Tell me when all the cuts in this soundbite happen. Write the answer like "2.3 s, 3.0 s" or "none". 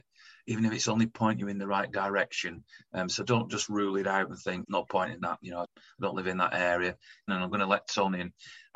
4.6 s, 5.6 s, 7.3 s

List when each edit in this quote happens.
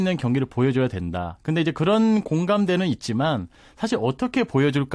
none

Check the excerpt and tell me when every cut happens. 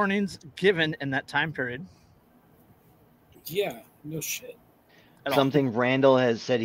none

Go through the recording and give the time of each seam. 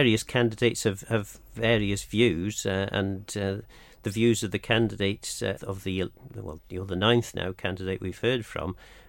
5.6 s, 6.6 s

